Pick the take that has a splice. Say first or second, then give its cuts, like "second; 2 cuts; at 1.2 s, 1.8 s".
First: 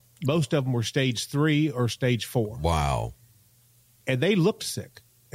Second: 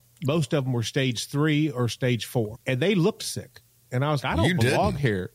second; 2 cuts; at 2.5 s, 4.2 s